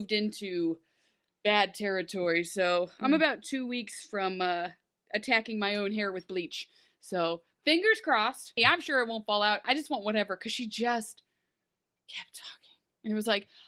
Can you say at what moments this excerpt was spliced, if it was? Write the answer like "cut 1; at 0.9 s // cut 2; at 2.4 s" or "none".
cut 1; at 8.6 s // cut 2; at 9.6 s

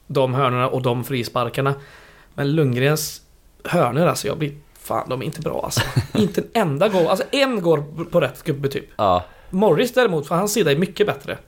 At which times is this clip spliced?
none

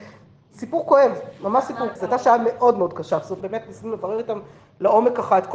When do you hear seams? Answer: cut 1; at 2.0 s // cut 2; at 3.4 s

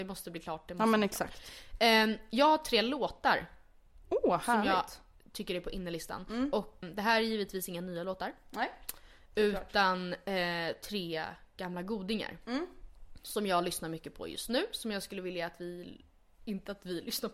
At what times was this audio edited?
cut 1; at 6.8 s

